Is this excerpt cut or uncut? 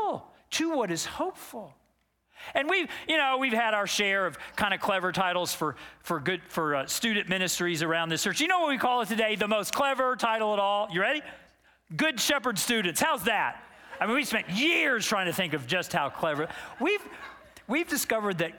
cut